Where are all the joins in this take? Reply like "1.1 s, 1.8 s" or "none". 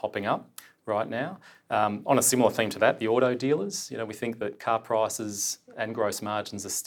none